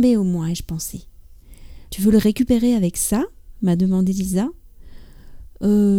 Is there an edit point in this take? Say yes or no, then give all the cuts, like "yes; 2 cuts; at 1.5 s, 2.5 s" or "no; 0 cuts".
yes; 1 cut; at 1.9 s